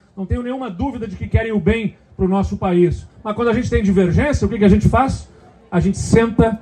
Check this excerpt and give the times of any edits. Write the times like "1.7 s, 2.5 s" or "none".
3.1 s

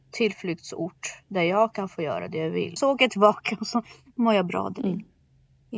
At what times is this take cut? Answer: 2.8 s

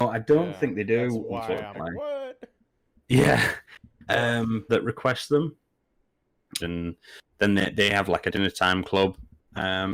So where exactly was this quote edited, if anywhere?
1.7 s, 4.7 s, 6.6 s

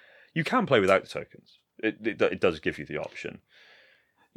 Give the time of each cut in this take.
none

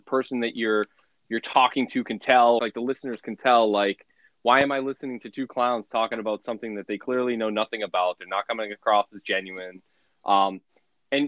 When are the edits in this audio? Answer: 2.6 s

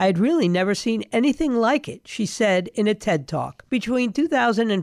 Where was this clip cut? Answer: none

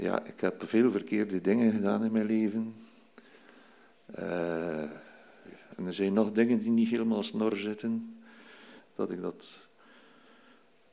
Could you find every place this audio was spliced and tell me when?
8.8 s

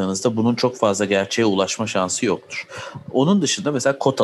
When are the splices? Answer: none

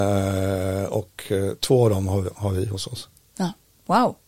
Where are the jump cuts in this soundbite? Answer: 2.3 s

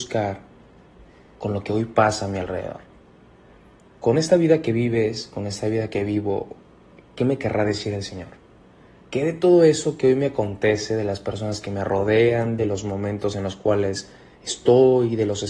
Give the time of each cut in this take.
9.0 s, 14.5 s

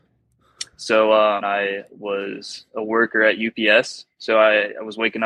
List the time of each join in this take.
1.4 s

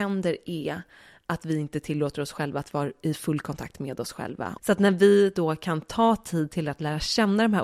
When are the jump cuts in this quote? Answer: 4.6 s

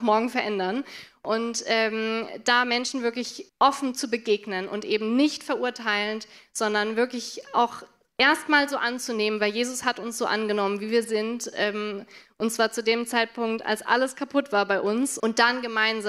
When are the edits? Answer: 3.5 s, 15.2 s

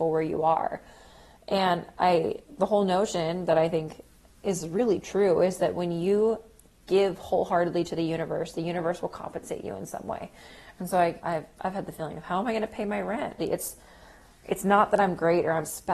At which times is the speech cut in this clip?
11.2 s, 13.4 s

